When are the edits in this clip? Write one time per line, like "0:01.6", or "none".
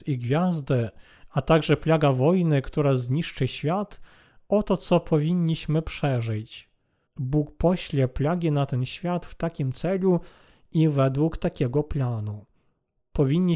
0:07.0

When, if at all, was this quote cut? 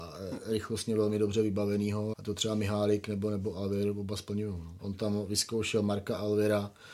0:02.1
0:04.8

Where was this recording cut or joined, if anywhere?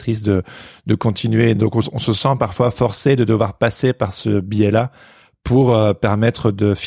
none

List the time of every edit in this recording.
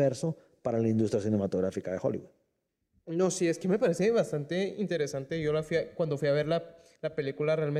none

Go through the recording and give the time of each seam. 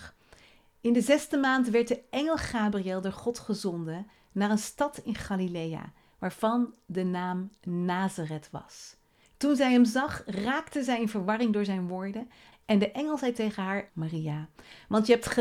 0:09.2
0:12.5
0:13.9

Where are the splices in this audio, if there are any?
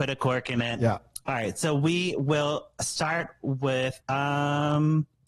0:04.0

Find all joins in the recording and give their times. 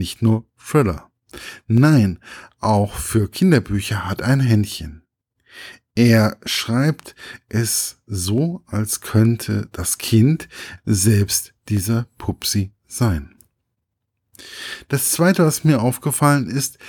0:10.8

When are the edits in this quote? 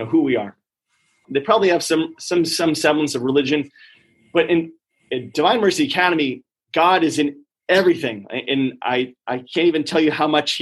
0:01.2

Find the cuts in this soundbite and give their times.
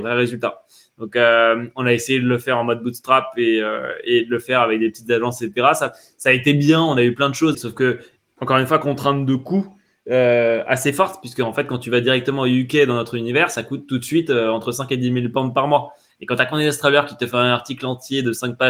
0:07.5
0:16.1

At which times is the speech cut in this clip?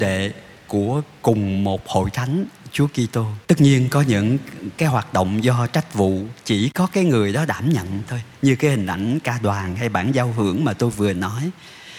0:03.4

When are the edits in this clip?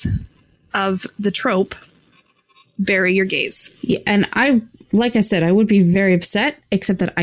none

